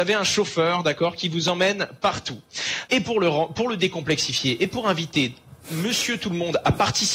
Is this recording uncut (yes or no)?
no